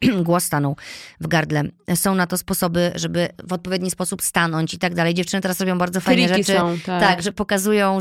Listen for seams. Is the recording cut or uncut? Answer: uncut